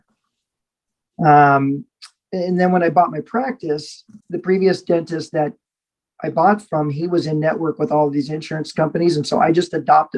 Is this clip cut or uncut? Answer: cut